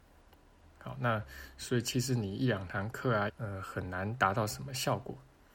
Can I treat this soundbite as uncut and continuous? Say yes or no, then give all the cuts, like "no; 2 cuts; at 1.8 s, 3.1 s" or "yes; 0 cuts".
no; 1 cut; at 3.3 s